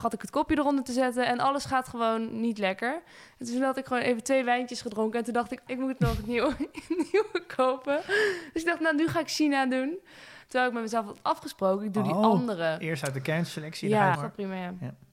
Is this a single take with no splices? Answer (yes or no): no